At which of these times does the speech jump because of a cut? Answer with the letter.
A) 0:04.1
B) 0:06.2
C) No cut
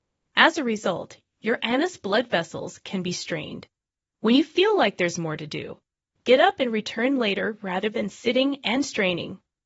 B